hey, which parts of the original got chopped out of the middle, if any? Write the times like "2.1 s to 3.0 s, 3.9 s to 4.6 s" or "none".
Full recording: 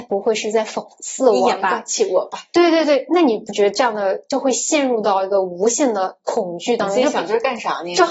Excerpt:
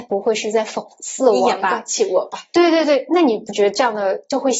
none